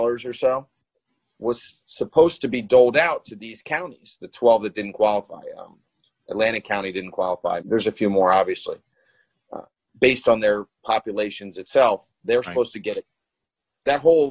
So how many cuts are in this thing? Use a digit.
1